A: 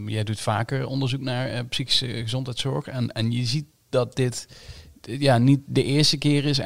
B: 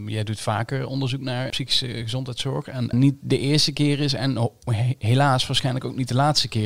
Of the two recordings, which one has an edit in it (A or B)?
B